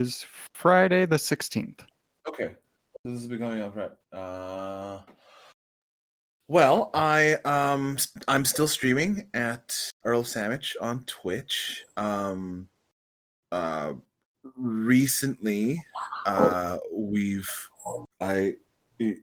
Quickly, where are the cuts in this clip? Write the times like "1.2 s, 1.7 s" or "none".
4.0 s, 10.0 s